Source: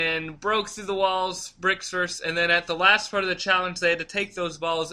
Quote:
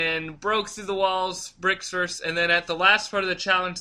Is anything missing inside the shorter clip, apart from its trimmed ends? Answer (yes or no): no